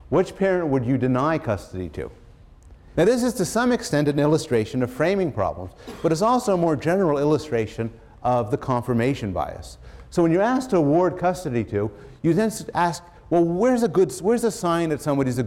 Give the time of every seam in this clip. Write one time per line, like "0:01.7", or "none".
0:02.9

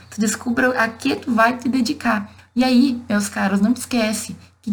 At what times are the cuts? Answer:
0:02.4

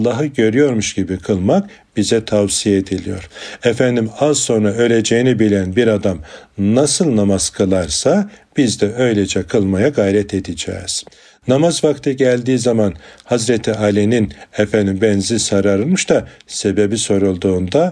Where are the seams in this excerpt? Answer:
none

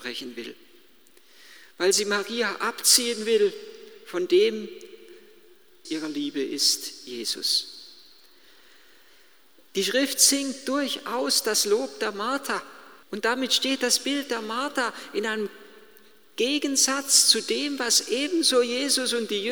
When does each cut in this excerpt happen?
0:05.8
0:13.0

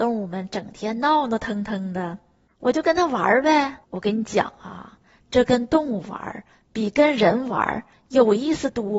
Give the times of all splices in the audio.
0:02.5
0:03.8

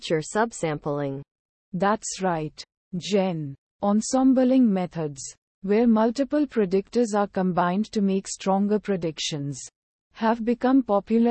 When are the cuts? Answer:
none

